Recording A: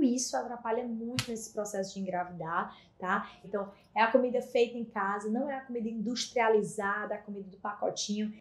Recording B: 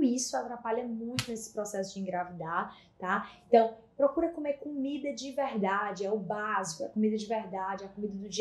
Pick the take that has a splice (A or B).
A